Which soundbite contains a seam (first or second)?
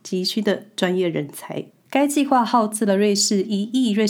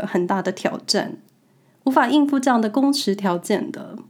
first